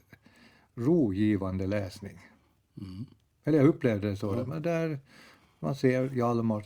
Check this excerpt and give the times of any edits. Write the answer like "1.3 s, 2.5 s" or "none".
none